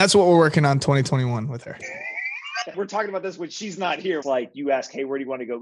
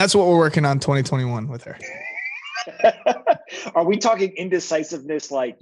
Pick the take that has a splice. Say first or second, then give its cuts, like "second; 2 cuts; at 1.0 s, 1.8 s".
first; 2 cuts; at 2.7 s, 4.2 s